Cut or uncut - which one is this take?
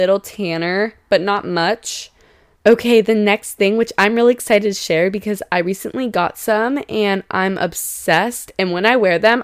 cut